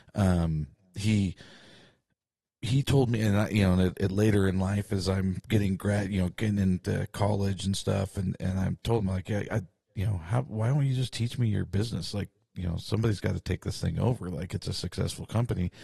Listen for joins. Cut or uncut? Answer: uncut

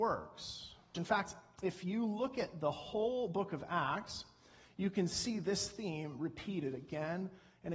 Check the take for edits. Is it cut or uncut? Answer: cut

